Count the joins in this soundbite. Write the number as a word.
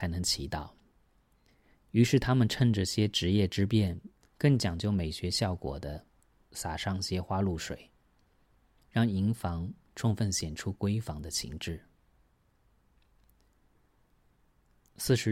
three